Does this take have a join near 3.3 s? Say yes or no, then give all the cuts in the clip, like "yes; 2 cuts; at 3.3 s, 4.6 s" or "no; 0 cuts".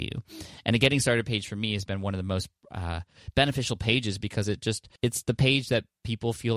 no; 1 cut; at 5.0 s